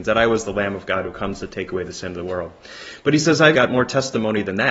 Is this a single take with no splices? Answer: no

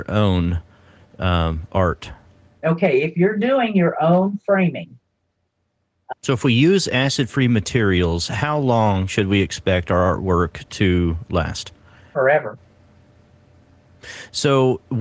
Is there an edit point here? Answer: yes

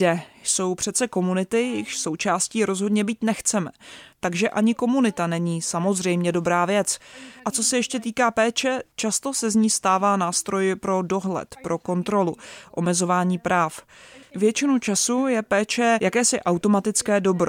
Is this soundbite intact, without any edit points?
no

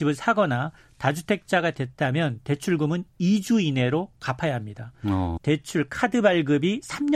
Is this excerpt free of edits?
no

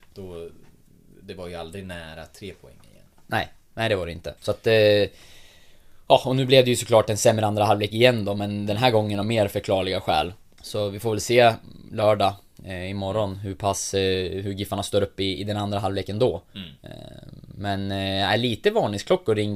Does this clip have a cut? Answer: yes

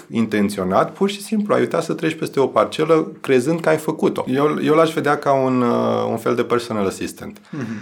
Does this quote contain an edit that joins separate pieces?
yes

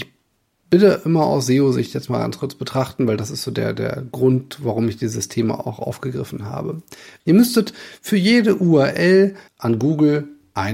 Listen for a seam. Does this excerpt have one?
yes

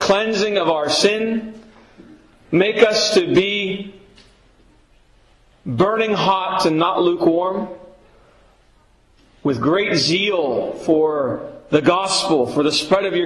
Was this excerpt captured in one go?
yes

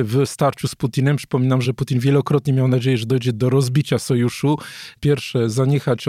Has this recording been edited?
yes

